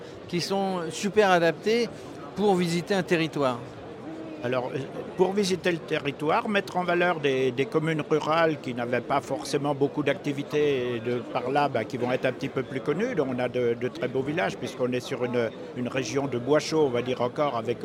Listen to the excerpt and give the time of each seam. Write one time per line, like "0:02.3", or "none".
none